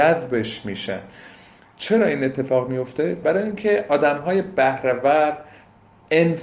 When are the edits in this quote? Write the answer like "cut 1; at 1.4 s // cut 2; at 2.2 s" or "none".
cut 1; at 3.2 s